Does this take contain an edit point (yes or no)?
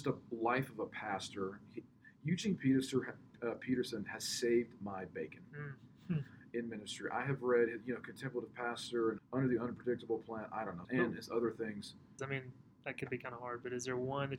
yes